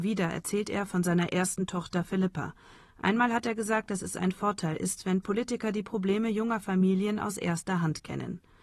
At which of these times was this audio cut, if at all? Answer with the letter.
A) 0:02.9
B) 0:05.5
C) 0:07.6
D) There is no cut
D